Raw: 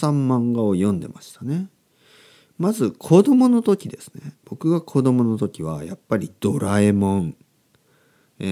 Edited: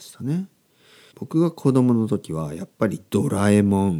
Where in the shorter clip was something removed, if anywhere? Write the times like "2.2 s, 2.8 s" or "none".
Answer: 1.1 s